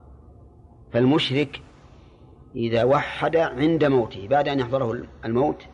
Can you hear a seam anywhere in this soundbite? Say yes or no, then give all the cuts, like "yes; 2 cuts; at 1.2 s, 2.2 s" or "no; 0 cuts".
no; 0 cuts